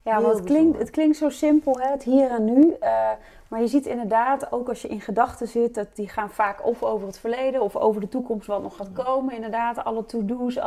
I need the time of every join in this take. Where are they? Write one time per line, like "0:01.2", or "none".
none